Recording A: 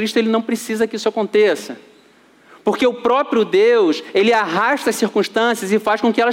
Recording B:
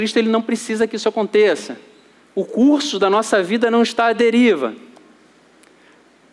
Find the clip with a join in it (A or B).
B